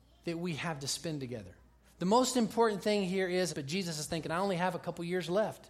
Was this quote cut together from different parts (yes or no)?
yes